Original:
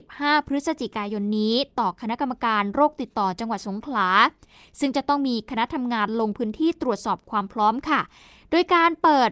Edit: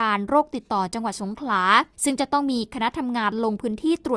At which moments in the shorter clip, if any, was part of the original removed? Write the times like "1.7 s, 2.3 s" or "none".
1.9 s